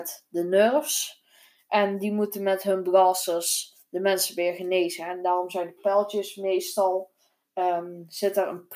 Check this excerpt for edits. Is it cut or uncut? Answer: uncut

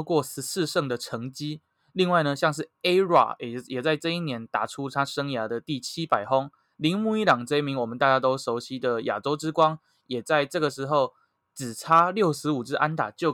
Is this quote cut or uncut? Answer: uncut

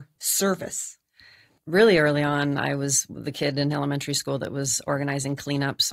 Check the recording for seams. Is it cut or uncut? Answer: uncut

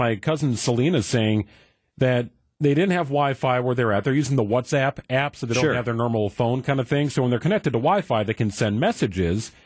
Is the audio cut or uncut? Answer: uncut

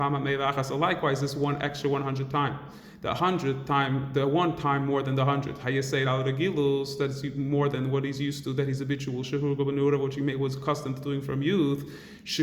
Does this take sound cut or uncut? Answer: uncut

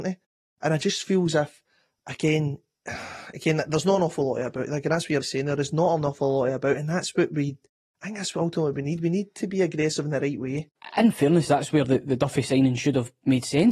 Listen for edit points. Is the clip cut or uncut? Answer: cut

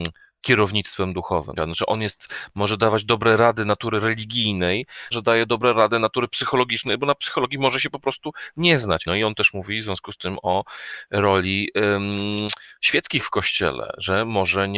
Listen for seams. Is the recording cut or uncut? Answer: cut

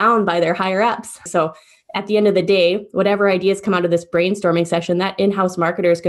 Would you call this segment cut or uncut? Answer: cut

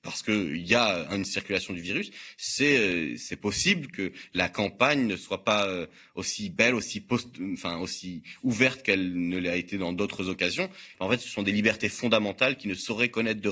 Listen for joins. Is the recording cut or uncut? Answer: cut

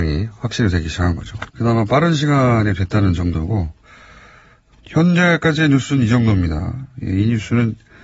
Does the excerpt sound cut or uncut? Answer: cut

